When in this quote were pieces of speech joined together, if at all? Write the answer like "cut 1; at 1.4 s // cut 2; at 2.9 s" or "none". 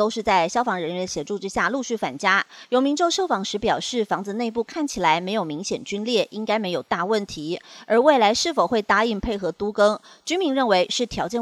none